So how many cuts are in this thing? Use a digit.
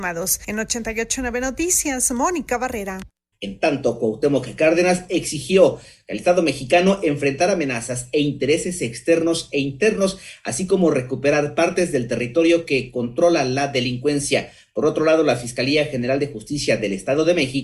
1